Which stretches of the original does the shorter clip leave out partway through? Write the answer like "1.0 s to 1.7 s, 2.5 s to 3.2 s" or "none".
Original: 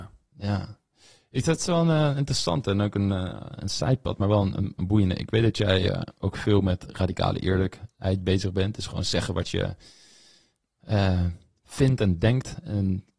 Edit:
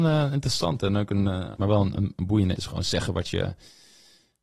3.4 s to 4.2 s, 5.2 s to 8.8 s